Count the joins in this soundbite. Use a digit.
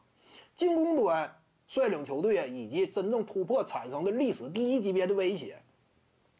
0